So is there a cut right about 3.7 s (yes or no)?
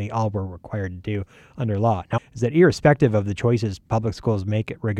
no